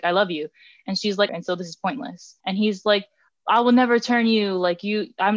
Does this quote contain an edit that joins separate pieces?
yes; 2 cuts; at 1.3 s, 2.4 s

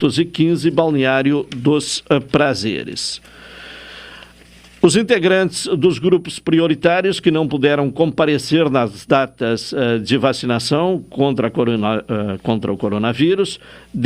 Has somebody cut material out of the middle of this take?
no; 0 cuts

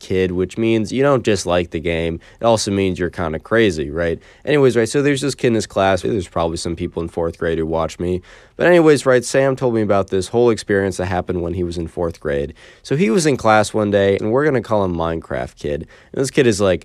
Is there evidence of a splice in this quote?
yes; 2 cuts; at 6.0 s, 14.2 s

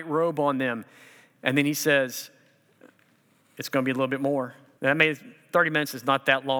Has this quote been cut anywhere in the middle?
yes; 1 cut; at 4.8 s

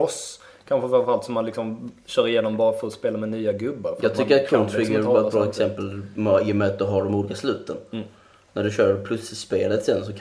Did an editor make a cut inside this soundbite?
no; 0 cuts

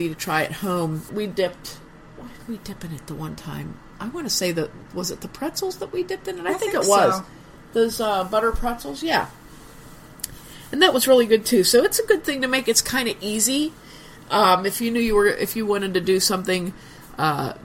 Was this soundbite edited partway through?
yes; 1 cut; at 1.1 s

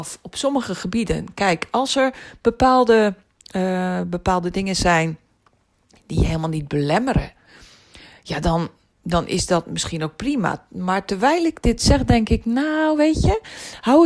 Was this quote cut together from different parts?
no; 0 cuts

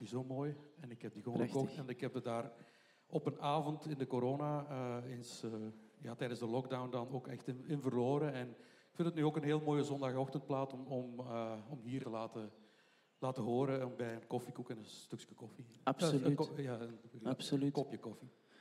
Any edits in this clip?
yes; 1 cut; at 12.0 s

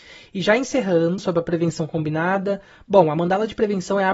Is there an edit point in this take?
yes; 1 cut; at 1.2 s

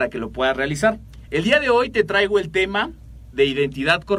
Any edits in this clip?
no; 0 cuts

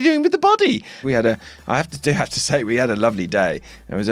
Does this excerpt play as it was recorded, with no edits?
no; 1 cut; at 1.0 s

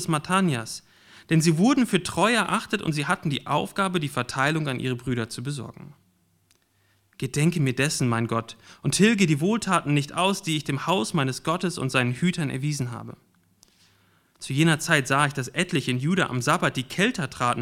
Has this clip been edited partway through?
no; 0 cuts

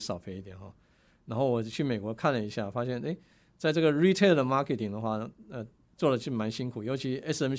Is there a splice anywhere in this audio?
no; 0 cuts

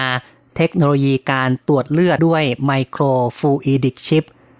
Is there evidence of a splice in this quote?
yes; 1 cut; at 2.2 s

